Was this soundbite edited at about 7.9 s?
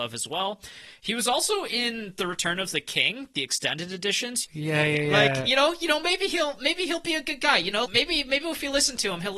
yes; 2 cuts; at 4.4 s, 7.9 s

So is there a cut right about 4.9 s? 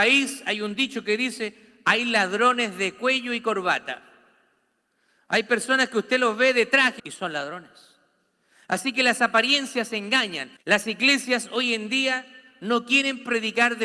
no; 2 cuts; at 7.0 s, 10.6 s

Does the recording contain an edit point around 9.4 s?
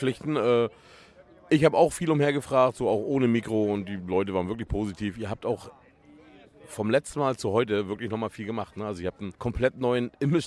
yes; 1 cut; at 9.4 s

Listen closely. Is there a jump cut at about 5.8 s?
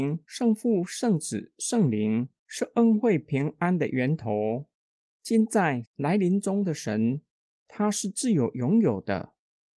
yes; 1 cut; at 5.8 s

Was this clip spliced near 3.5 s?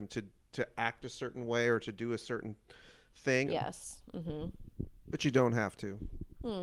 yes; 1 cut; at 3.5 s

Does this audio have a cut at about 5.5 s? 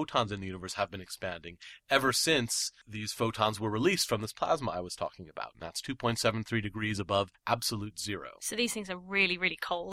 yes; 1 cut; at 5.5 s

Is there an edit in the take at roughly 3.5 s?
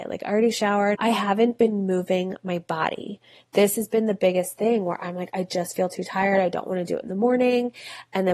no; 1 cut; at 0.9 s

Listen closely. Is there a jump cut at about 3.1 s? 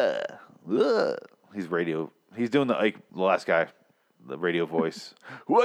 yes; 1 cut; at 3.1 s

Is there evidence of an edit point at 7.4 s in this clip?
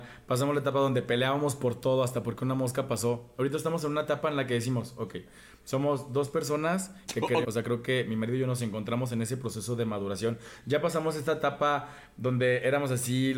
yes; 1 cut; at 7.4 s

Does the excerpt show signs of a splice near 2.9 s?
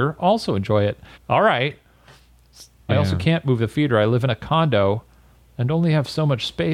yes; 2 cuts; at 1.2 s, 2.9 s

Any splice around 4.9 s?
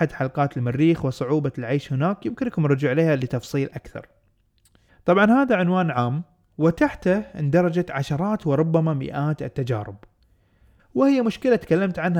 yes; 2 cuts; at 4.9 s, 10.8 s

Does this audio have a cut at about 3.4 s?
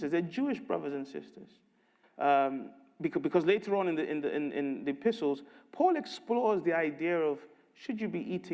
no; 1 cut; at 2.0 s

